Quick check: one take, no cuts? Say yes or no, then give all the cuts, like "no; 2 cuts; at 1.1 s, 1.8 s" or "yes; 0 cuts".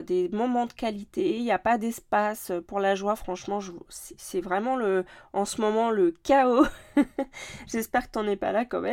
yes; 0 cuts